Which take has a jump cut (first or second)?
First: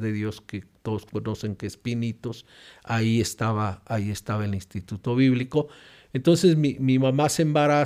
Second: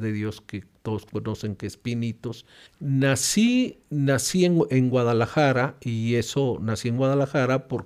second